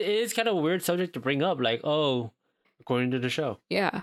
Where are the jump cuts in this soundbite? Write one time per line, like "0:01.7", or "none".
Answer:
0:02.6